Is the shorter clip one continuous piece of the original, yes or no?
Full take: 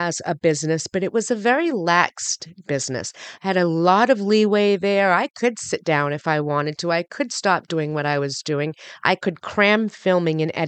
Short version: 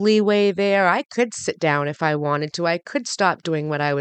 yes